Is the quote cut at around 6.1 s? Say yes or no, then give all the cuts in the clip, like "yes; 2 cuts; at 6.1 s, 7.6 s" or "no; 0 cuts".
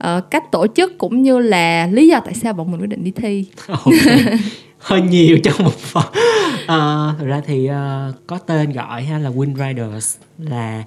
no; 1 cut; at 8.2 s